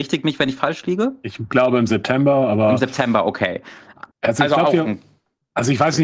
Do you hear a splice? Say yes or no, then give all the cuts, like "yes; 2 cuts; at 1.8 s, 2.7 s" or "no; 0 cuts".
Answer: yes; 1 cut; at 4.1 s